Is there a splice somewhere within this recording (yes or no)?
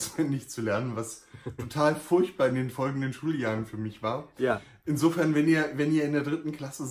no